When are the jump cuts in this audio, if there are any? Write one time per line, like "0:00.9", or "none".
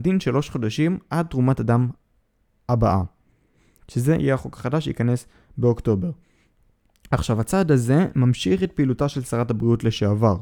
none